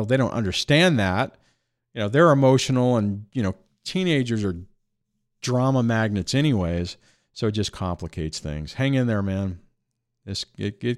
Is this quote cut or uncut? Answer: uncut